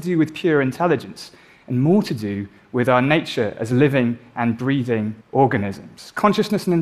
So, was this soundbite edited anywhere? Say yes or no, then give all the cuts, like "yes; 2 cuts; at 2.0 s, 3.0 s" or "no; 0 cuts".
yes; 1 cut; at 5.2 s